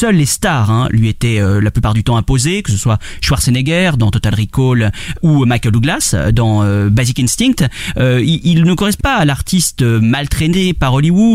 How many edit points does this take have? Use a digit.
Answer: 2